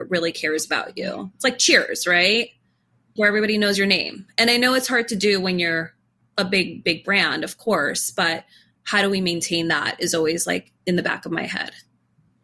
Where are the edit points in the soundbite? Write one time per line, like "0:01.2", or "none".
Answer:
0:03.2